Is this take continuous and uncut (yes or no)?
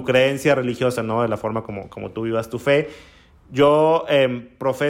yes